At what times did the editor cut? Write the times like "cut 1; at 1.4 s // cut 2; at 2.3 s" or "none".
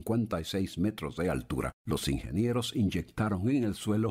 cut 1; at 1.8 s

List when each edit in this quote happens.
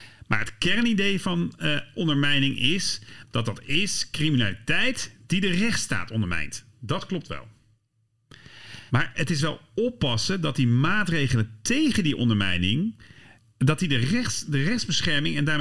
cut 1; at 8.9 s

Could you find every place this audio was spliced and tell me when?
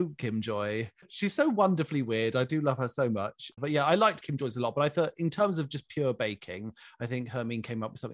none

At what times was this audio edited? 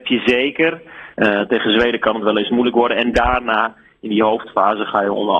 cut 1; at 1.1 s

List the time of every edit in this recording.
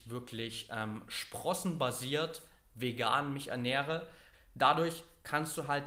cut 1; at 4.3 s

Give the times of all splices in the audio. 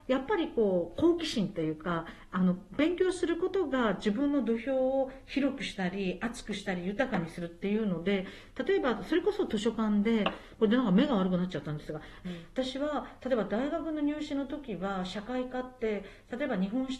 cut 1; at 12.2 s

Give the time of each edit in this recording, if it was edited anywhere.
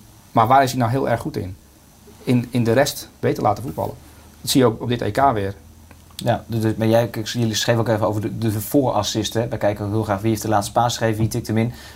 none

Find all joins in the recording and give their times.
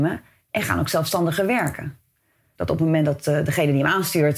cut 1; at 2.6 s

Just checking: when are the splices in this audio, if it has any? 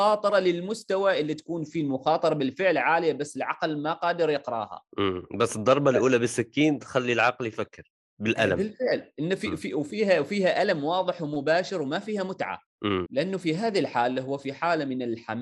cut 1; at 4.9 s // cut 2; at 13.1 s

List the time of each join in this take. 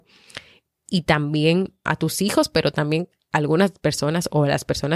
cut 1; at 1.9 s

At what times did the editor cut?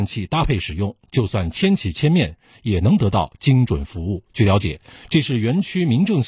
cut 1; at 4.3 s

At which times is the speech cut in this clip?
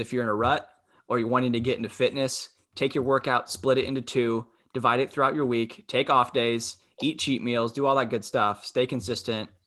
none

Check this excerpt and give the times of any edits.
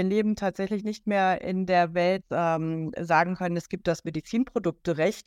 cut 1; at 2.2 s

